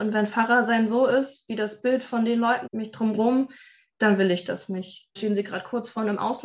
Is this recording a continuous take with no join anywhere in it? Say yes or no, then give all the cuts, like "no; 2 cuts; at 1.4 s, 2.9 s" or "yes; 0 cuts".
no; 2 cuts; at 2.6 s, 5.2 s